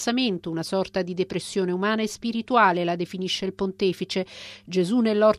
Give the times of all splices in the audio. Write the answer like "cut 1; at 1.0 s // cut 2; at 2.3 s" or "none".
none